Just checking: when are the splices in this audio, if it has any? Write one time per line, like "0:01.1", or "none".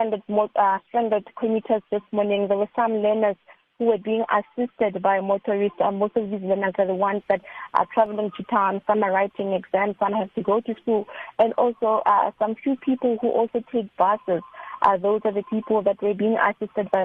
none